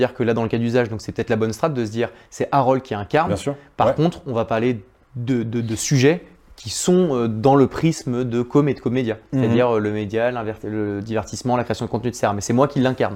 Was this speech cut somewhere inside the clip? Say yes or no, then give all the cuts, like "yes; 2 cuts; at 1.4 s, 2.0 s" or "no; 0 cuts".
no; 0 cuts